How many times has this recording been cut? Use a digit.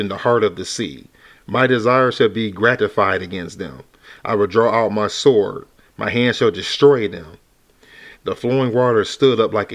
2